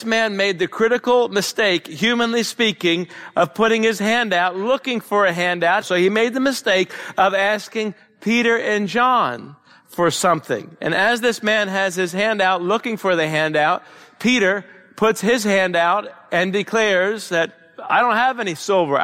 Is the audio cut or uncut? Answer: cut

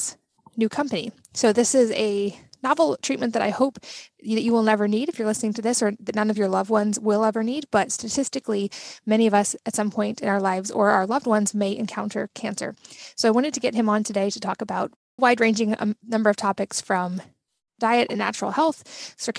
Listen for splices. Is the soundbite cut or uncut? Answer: cut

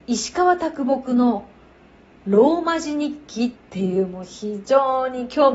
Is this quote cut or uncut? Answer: cut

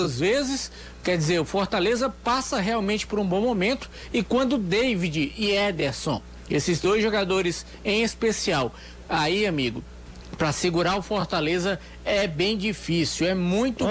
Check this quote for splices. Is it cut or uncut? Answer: cut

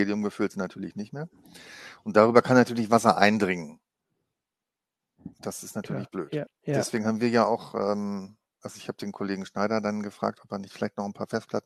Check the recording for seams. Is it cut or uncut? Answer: cut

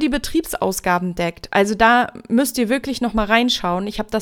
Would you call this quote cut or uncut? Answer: uncut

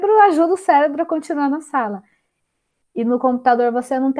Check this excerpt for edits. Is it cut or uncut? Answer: uncut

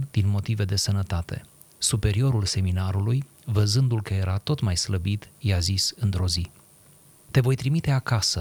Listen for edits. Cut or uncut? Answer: uncut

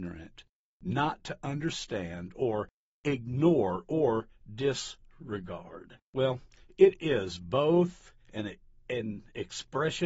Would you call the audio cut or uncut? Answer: uncut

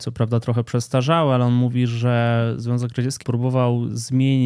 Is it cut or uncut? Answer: cut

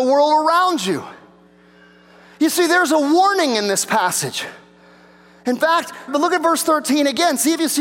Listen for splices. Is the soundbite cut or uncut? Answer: cut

